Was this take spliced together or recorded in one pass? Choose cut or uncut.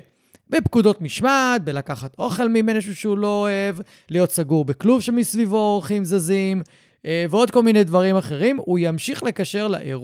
uncut